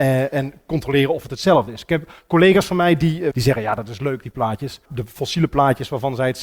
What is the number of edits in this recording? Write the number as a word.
two